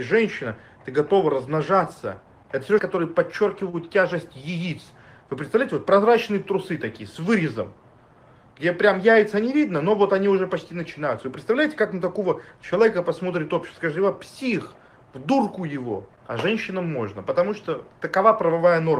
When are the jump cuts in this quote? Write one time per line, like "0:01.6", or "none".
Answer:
0:02.8